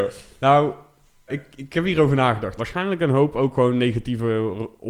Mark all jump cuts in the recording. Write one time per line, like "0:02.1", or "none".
0:01.3
0:02.6